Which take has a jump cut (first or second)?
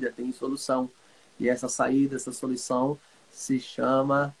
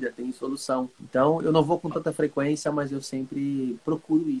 second